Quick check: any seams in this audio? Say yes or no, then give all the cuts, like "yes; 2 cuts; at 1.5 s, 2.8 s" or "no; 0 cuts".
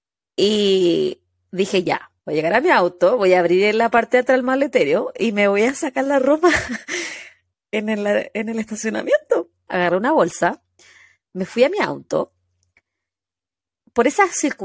yes; 2 cuts; at 2.2 s, 9.7 s